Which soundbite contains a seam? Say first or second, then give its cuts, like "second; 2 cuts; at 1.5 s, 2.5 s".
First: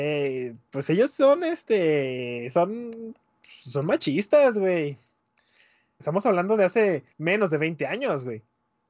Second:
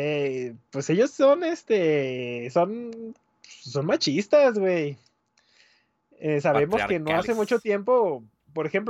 first; 2 cuts; at 6.0 s, 7.1 s